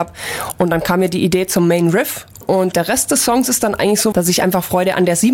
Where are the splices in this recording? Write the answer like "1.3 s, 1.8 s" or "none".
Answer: 2.4 s, 4.1 s